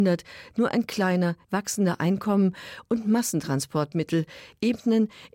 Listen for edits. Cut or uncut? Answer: cut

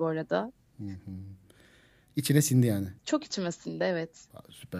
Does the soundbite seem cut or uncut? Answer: cut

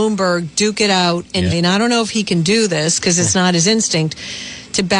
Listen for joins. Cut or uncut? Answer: cut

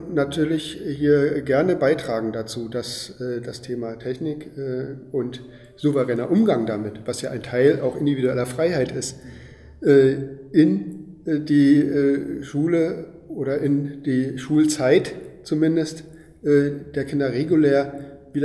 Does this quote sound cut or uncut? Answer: uncut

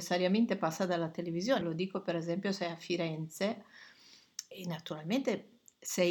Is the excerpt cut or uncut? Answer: cut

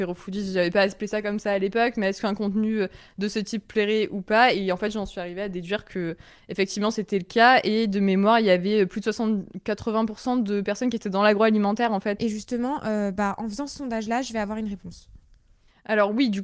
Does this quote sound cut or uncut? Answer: cut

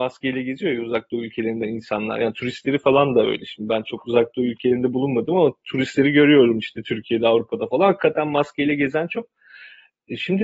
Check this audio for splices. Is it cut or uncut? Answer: uncut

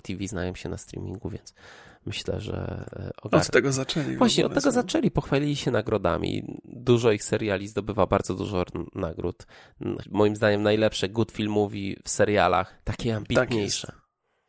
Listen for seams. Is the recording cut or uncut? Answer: cut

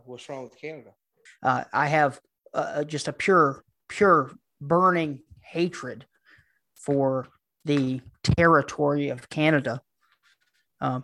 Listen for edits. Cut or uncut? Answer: cut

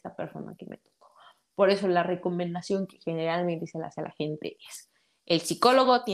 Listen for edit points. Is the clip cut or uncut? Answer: uncut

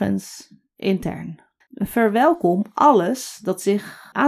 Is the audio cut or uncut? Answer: cut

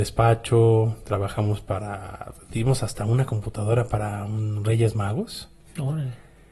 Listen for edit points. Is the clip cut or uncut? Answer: uncut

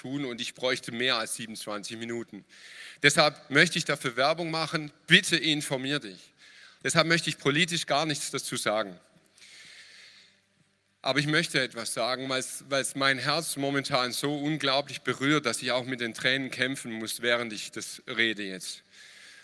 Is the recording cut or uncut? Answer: cut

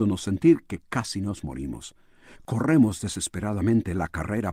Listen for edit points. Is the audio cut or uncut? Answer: uncut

